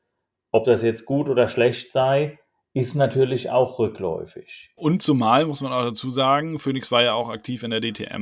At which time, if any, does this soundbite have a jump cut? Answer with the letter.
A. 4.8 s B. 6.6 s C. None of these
A